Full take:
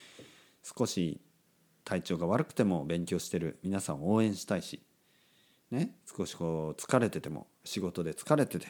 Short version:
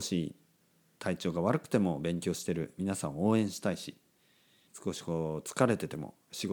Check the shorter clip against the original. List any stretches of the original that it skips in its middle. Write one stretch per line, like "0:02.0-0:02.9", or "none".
0:05.5-0:06.0